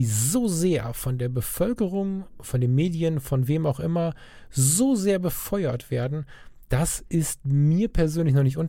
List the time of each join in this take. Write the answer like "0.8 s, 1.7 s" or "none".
none